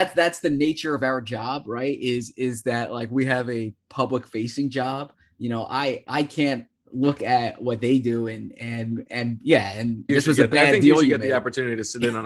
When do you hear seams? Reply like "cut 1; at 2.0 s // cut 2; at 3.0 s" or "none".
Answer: cut 1; at 10.1 s